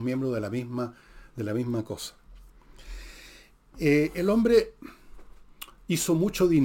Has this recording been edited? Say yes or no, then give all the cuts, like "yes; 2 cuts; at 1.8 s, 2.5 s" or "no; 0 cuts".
no; 0 cuts